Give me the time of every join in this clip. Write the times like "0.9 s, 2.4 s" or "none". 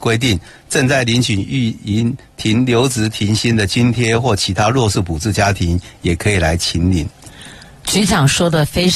none